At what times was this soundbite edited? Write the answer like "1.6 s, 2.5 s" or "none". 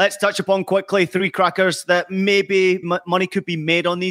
2.8 s